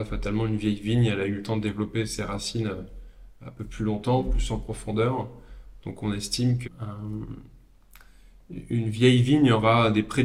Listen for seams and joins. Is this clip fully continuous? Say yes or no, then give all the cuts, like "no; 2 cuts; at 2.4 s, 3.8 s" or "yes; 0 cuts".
no; 1 cut; at 6.6 s